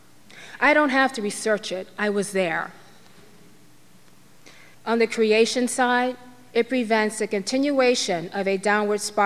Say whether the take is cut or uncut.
cut